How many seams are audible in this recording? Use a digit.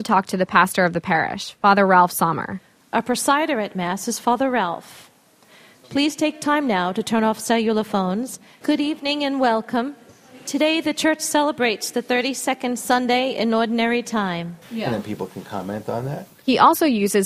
2